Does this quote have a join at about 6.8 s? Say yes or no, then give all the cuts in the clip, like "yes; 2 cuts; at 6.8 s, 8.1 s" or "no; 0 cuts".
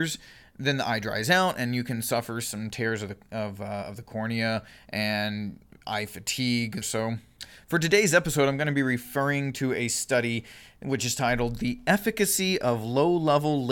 yes; 1 cut; at 6.8 s